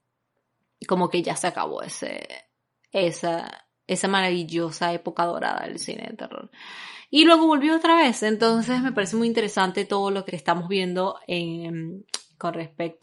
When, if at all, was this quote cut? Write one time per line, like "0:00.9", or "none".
0:10.3